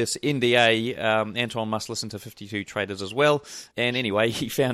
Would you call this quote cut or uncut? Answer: cut